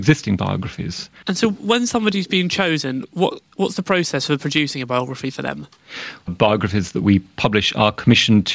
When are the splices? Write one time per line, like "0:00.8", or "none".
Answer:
0:01.2
0:06.3